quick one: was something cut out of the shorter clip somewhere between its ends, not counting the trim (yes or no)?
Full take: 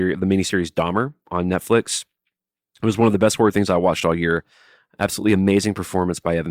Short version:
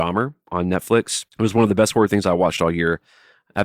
yes